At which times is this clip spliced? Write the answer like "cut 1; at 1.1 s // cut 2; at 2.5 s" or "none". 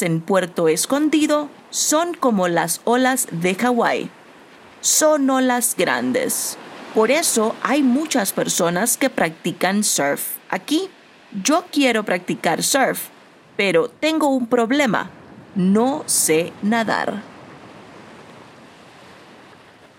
cut 1; at 5.8 s